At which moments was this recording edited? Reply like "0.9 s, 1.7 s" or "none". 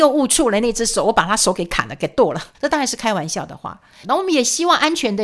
2.5 s, 4.0 s

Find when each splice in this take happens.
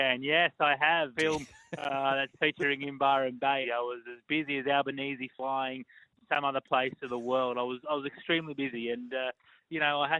1.1 s, 3.6 s

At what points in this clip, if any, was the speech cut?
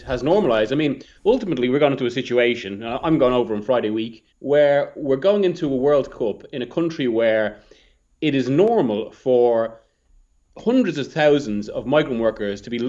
1.2 s, 4.3 s

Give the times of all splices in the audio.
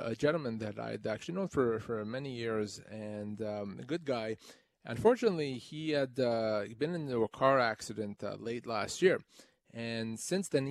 none

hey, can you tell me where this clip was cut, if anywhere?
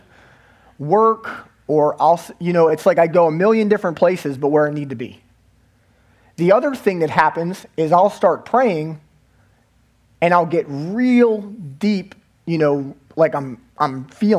none

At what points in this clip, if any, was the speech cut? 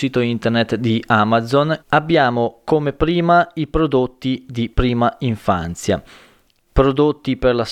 1.8 s

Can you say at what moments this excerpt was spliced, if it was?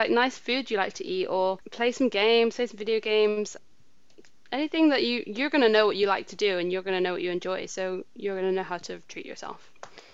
1.6 s

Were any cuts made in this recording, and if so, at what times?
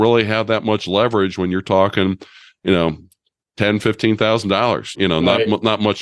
4.9 s

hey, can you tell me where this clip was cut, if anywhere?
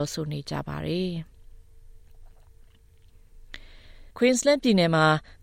4.1 s

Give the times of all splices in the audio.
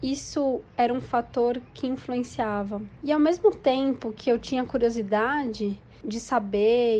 3.0 s

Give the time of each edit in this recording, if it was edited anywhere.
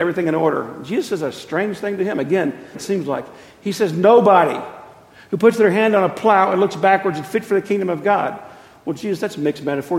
2.7 s

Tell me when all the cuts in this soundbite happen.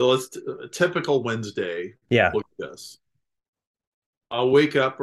2.5 s

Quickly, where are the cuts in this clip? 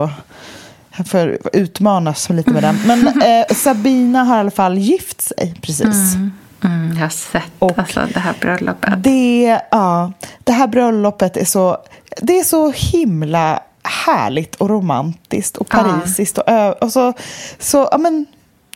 3.5 s

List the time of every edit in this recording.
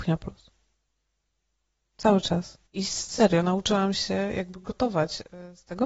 2.7 s

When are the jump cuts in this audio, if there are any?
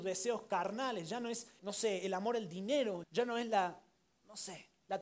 1.6 s, 3.0 s

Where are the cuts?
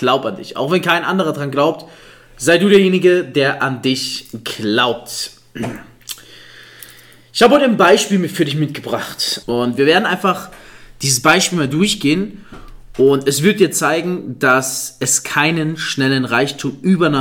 9.4 s

